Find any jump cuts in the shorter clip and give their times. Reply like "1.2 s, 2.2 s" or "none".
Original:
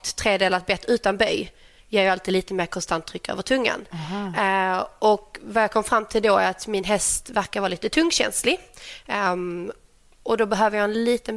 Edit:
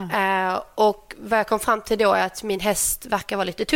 none